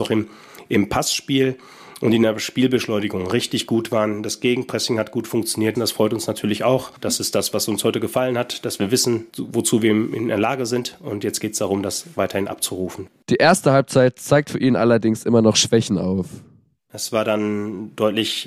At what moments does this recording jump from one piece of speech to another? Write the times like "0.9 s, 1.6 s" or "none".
5.7 s, 9.3 s